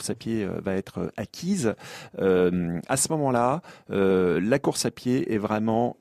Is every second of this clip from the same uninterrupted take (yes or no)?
yes